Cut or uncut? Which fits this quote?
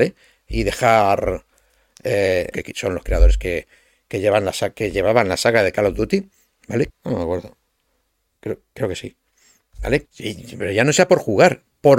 cut